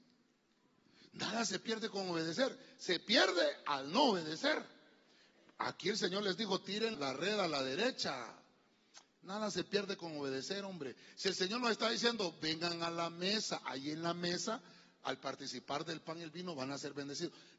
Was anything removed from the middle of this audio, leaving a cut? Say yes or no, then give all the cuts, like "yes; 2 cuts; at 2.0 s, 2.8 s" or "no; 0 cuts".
yes; 1 cut; at 6.9 s